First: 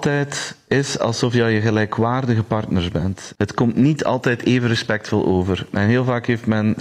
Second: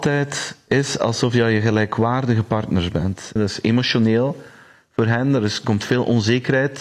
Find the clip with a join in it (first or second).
second